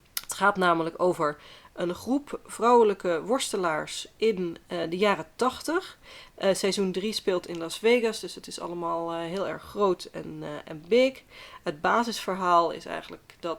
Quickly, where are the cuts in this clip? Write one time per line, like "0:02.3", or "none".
0:06.3